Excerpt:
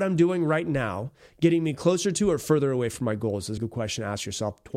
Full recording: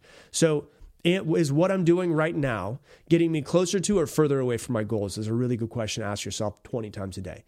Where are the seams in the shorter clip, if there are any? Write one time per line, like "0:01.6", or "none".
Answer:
0:03.6

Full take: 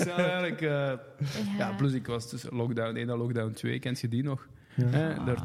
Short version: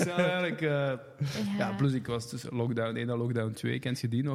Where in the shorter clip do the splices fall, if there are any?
none

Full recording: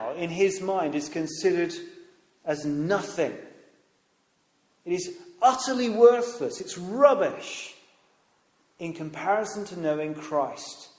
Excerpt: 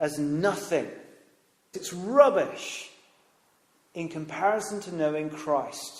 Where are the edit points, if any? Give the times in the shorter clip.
0:01.7

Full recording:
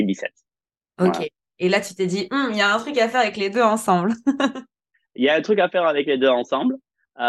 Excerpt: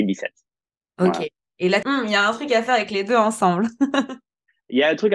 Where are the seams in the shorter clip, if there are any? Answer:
0:01.8

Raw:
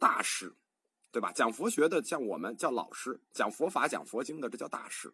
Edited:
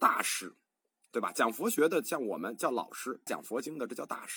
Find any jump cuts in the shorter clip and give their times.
0:03.3

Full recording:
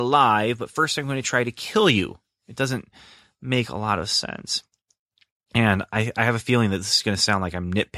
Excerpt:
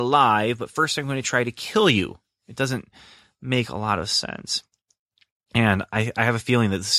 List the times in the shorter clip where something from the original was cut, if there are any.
none

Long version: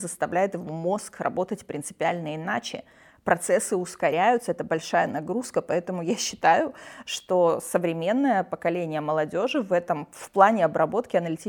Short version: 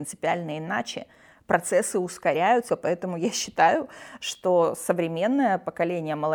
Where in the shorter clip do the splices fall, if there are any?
0:02.7

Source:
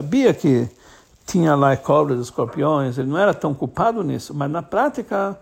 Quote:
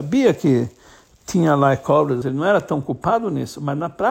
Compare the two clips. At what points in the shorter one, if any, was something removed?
0:02.2

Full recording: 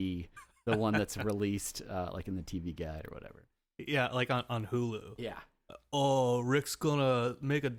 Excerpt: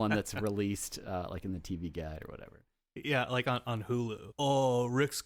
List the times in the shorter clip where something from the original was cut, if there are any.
0:04.3

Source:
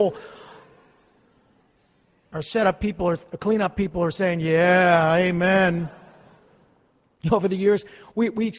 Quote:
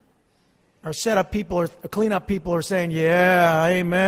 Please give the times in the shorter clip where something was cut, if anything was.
none

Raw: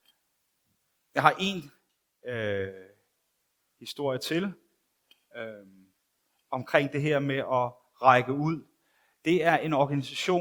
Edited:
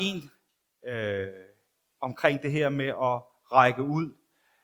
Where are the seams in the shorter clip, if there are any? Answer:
0:01.9

